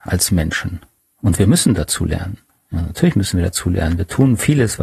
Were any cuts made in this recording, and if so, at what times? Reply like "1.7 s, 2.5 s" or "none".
none